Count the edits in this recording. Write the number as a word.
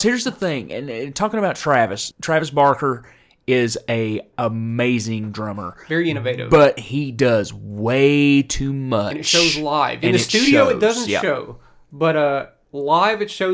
one